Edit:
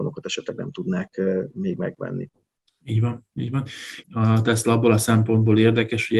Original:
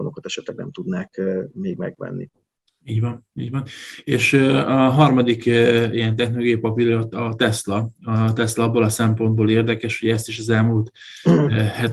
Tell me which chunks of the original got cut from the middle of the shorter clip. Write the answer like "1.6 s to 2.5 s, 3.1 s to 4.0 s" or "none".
4.0 s to 7.9 s